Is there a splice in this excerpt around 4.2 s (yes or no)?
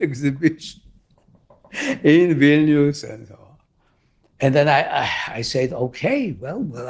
no